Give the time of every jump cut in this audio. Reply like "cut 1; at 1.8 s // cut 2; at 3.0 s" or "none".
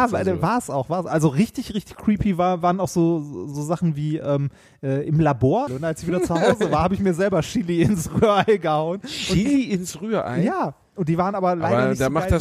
cut 1; at 5.7 s